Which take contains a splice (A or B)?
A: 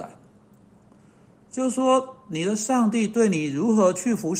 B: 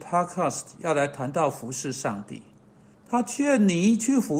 B